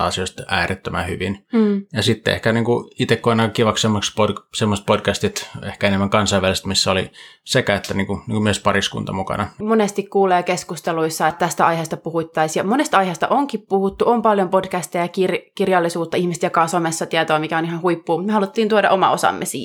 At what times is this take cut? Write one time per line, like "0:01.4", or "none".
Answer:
0:09.6
0:11.3

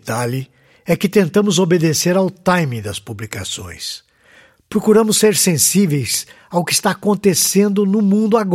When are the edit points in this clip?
none

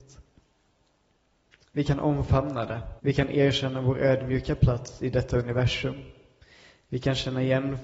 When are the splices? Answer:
0:01.6
0:03.0

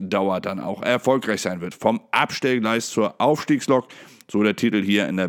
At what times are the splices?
0:01.7

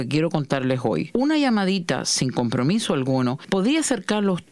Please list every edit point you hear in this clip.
0:01.1

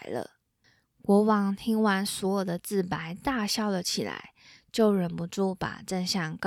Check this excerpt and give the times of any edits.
none

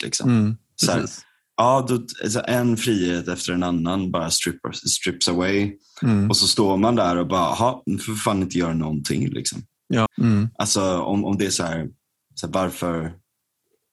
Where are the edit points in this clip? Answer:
0:10.1

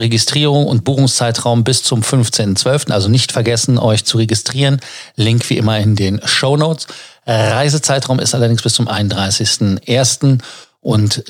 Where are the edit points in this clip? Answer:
none

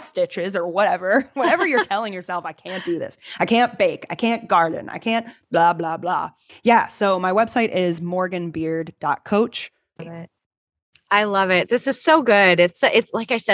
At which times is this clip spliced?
0:06.5
0:10.0

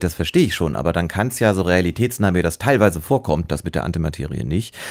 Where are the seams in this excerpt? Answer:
none

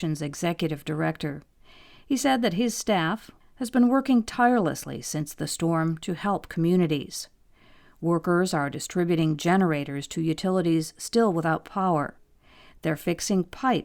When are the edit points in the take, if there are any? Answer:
0:03.4

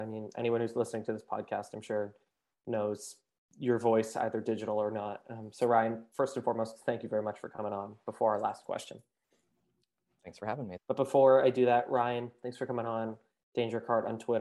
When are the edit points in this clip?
0:10.8

